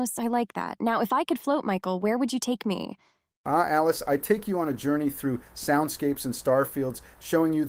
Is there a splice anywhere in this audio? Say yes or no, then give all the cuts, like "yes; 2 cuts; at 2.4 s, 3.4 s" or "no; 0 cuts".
no; 0 cuts